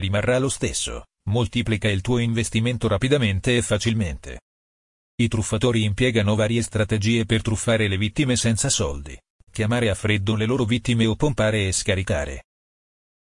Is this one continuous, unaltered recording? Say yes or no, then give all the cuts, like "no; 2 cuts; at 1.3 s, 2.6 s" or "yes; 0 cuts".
no; 1 cut; at 9.3 s